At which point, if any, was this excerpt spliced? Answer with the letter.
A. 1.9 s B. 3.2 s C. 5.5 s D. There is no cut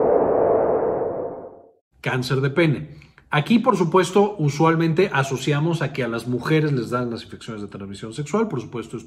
D